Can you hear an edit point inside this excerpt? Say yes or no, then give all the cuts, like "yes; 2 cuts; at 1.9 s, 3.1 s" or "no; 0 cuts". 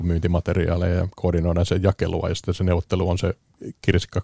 no; 0 cuts